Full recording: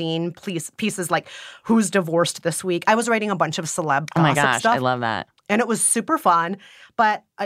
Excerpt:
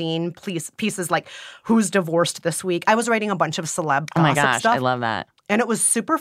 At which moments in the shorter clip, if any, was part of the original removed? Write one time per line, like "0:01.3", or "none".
none